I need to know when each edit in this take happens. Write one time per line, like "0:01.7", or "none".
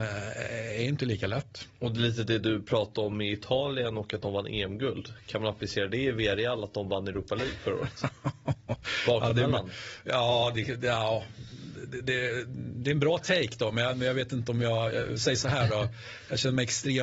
none